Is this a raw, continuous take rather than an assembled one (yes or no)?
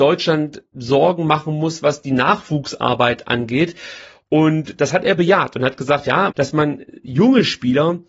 no